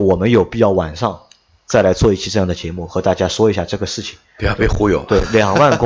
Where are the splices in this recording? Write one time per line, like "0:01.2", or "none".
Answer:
none